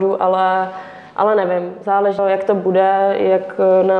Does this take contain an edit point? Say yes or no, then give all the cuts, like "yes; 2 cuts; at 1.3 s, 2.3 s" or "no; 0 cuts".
yes; 1 cut; at 2.2 s